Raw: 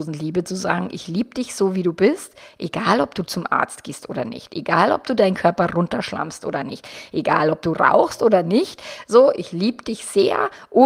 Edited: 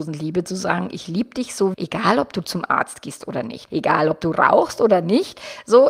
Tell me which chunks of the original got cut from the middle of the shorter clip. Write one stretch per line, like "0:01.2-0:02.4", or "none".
0:01.7-0:02.6
0:04.5-0:07.1